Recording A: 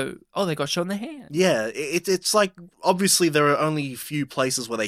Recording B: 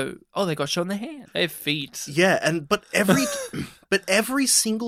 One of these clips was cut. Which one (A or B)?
B